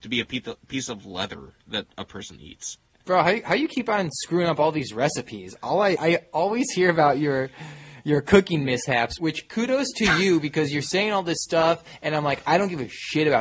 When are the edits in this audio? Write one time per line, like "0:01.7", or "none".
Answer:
0:06.0
0:09.2